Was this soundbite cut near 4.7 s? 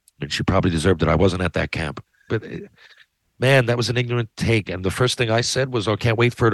yes; 2 cuts; at 2.3 s, 4.7 s

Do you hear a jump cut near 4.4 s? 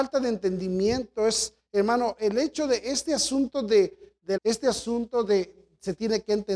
yes; 1 cut; at 4.4 s

